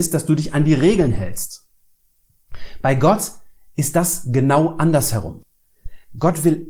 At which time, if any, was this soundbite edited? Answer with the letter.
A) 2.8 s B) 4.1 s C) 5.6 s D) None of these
D